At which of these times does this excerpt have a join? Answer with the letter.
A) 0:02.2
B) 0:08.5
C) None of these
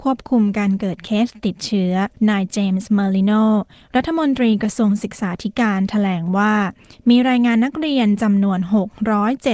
A